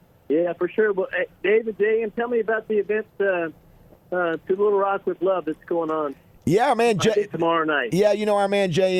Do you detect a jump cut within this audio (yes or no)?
no